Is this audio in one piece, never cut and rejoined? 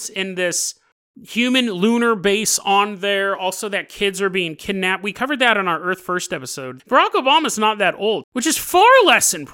no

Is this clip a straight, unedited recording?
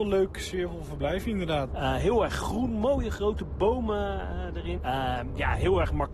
no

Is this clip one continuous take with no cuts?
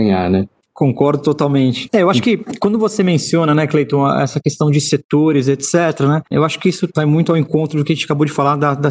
yes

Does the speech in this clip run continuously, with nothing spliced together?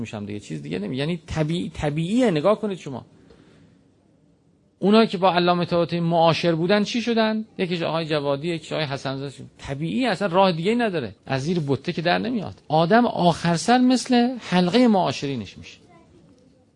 no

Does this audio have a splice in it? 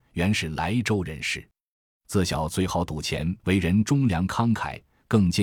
yes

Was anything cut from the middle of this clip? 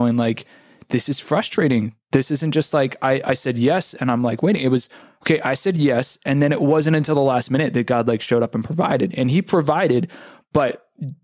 no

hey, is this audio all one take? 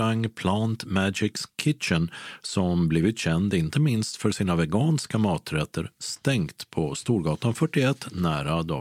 yes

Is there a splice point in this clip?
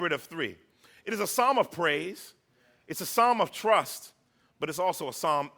no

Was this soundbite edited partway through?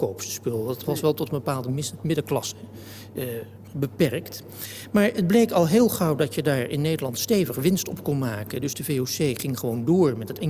no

